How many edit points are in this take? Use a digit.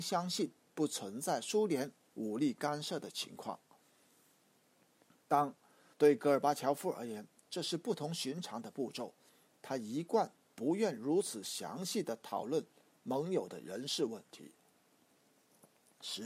1